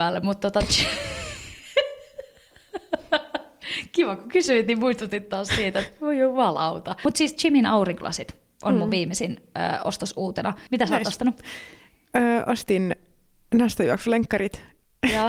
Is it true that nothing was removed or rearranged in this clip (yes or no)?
yes